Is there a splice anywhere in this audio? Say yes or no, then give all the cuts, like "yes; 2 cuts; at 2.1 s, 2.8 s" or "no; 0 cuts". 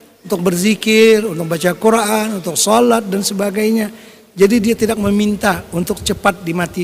no; 0 cuts